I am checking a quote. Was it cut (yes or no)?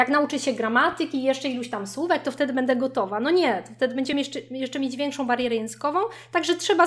no